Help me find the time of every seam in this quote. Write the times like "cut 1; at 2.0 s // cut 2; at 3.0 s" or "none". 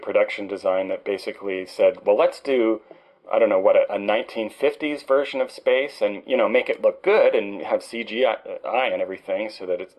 none